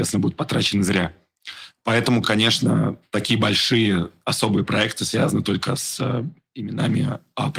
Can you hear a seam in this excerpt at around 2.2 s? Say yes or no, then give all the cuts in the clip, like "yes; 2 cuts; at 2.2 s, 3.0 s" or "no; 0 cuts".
no; 0 cuts